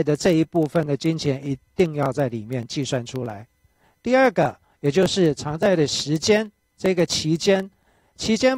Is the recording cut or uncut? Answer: uncut